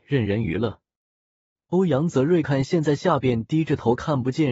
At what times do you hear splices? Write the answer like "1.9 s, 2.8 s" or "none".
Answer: 2.4 s